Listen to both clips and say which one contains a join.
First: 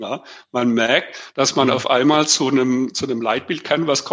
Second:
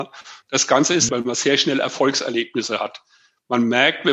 second; 1 cut; at 1.1 s

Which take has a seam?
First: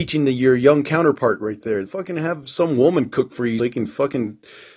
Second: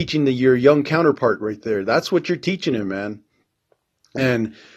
first; 2 cuts; at 1.8 s, 3.6 s

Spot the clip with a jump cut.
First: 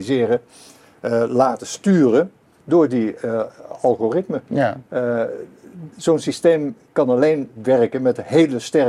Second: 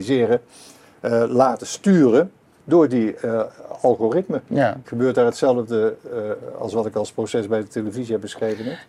second; 1 cut; at 4.8 s

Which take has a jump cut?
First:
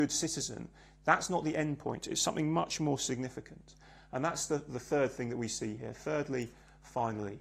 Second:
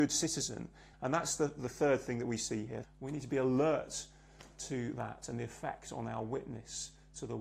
second; 2 cuts; at 0.9 s, 2.8 s

